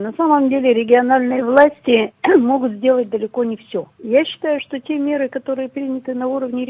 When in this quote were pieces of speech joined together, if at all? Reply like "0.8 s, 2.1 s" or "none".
3.9 s